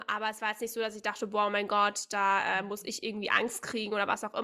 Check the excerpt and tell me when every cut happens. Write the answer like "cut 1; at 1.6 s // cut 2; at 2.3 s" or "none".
none